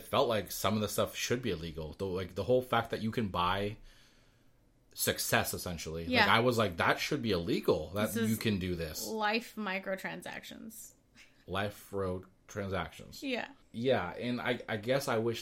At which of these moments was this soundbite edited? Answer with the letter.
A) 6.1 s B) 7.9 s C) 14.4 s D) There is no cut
D